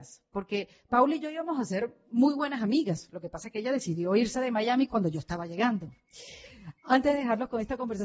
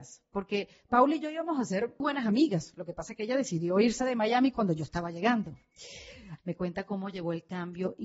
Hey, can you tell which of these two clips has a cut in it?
second; 2 cuts; at 2.0 s, 6.4 s

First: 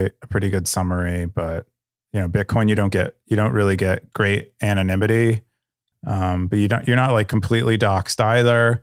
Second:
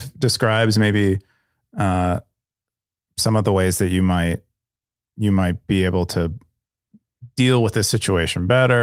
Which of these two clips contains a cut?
first; 1 cut; at 5.9 s

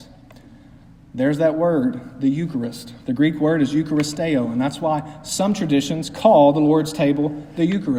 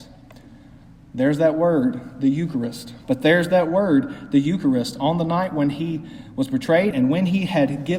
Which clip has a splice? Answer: second; 2 cuts; at 3.0 s, 6.9 s

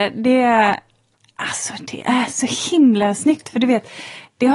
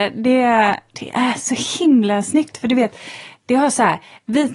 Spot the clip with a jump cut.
second; 1 cut; at 0.9 s

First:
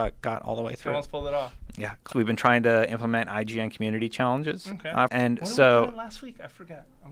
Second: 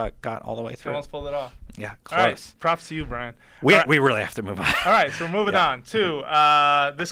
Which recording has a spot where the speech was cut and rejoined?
first; 2 cuts; at 2.1 s, 5.1 s

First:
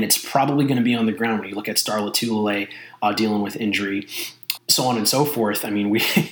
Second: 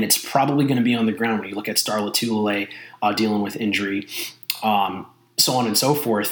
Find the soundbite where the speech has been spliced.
first; 1 cut; at 4.6 s

